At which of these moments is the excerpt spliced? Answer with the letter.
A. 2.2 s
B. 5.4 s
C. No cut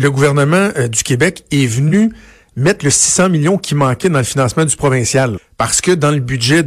B